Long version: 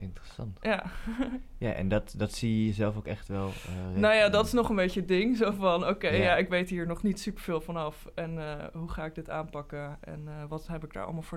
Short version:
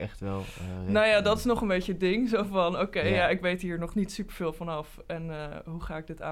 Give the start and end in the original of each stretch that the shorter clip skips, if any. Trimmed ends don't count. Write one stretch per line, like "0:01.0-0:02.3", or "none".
none